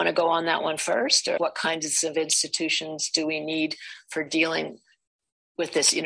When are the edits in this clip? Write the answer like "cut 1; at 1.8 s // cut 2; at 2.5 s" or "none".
cut 1; at 1.4 s